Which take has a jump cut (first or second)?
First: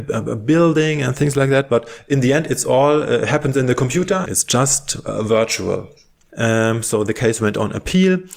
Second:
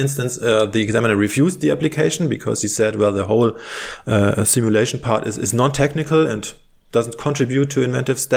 first